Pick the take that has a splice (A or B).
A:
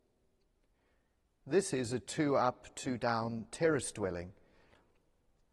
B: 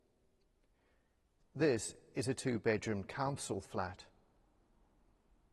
B